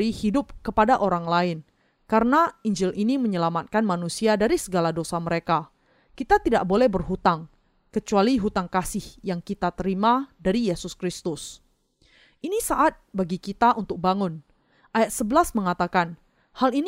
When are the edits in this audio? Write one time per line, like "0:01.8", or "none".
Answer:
none